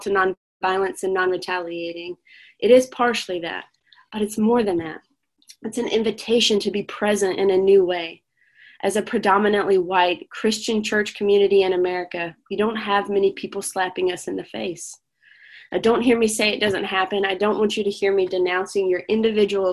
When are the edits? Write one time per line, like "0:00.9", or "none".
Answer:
none